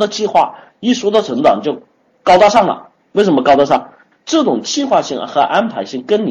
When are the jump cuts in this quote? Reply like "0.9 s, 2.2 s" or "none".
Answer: 4.1 s